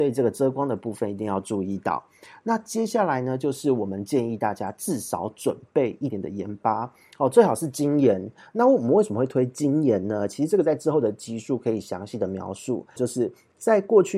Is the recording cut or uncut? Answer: cut